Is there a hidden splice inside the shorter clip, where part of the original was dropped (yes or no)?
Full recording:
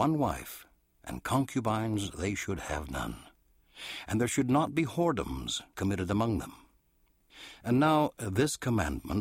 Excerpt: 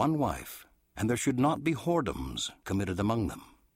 yes